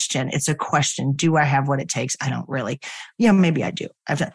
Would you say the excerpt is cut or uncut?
uncut